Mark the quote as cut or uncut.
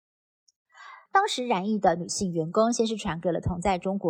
cut